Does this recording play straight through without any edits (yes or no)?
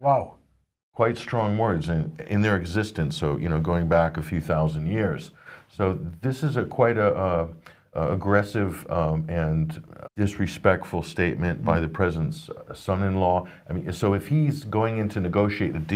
no